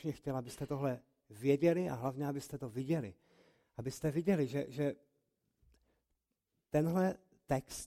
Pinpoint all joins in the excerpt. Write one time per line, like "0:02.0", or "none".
none